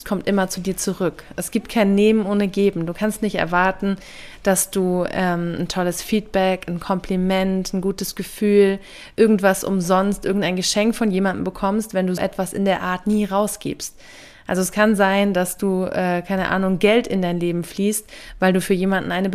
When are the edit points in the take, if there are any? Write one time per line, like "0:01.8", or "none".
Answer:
0:12.2